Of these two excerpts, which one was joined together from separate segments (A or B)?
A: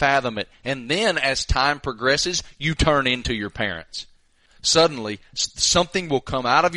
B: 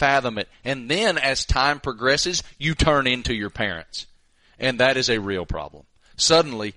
A